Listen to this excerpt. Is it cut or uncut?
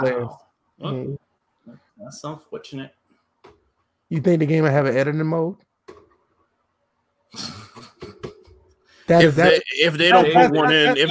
cut